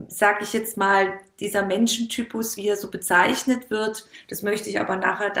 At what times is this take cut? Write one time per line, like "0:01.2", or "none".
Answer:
none